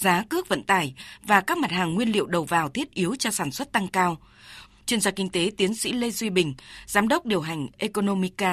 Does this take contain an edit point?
yes; 1 cut; at 4.7 s

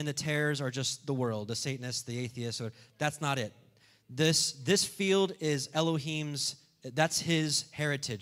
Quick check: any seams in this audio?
no; 0 cuts

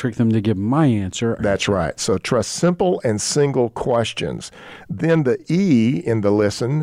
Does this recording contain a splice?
yes; 1 cut; at 1.4 s

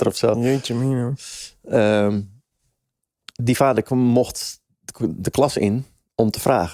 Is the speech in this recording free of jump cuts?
yes; 0 cuts

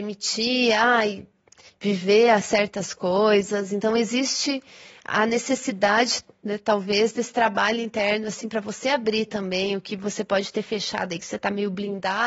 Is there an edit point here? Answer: no; 0 cuts

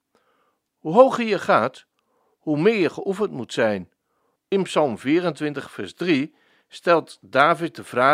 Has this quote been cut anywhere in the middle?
yes; 1 cut; at 4.4 s

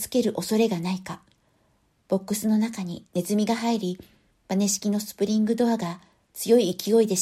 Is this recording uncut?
yes; 0 cuts

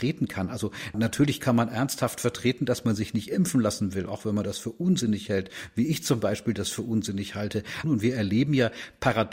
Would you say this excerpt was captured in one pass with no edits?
no; 1 cut; at 7.8 s

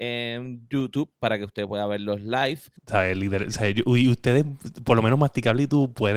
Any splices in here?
yes; 1 cut; at 2.8 s

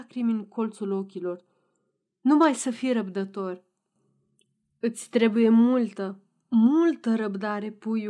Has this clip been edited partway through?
no; 0 cuts

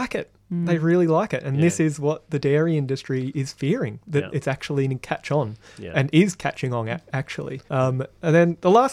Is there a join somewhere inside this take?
yes; 1 cut; at 7.7 s

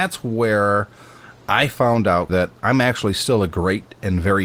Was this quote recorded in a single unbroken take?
no; 1 cut; at 2.3 s

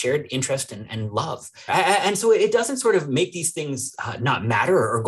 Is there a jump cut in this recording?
yes; 1 cut; at 1.7 s

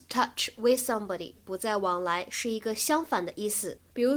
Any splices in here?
yes; 1 cut; at 1.3 s

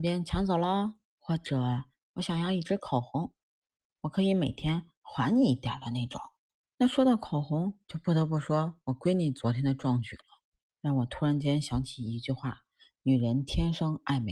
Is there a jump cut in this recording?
no; 0 cuts

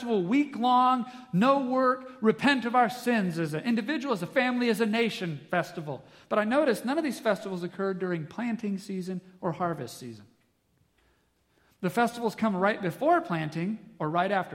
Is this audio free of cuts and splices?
yes; 0 cuts

